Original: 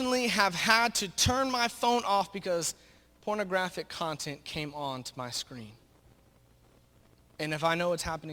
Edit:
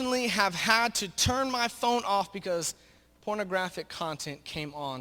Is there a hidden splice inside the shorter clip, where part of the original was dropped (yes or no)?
no